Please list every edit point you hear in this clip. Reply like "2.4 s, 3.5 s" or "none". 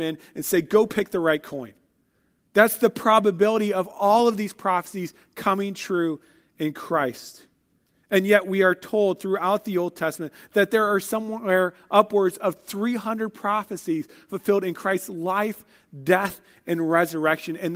none